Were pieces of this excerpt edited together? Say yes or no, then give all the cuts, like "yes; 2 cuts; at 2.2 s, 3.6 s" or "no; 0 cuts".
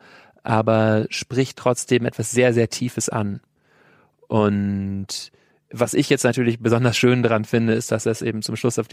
no; 0 cuts